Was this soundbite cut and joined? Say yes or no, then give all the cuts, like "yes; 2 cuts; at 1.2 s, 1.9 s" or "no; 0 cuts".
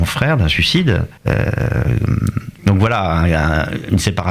yes; 2 cuts; at 1.2 s, 2.6 s